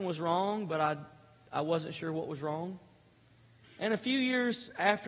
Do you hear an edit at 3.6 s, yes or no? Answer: yes